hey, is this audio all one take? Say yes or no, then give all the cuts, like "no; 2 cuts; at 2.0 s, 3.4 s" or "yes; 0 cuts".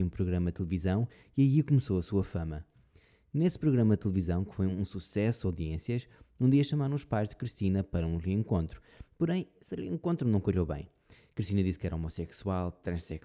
yes; 0 cuts